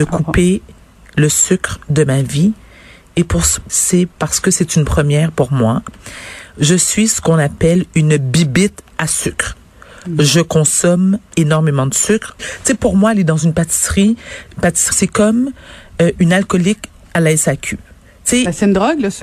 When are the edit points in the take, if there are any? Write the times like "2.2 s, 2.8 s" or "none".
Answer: 3.7 s, 12.4 s, 14.9 s